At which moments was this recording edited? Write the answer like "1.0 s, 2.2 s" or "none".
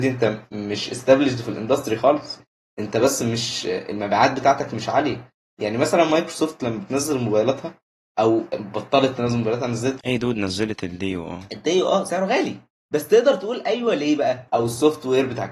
14.5 s